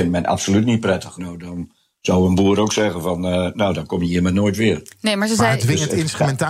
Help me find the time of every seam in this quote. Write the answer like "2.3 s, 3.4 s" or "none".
1.2 s